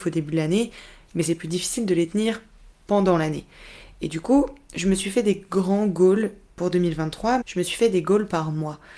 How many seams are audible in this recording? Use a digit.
1